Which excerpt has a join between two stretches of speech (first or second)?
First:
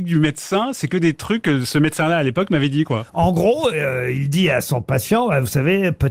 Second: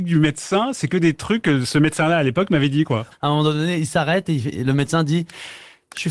second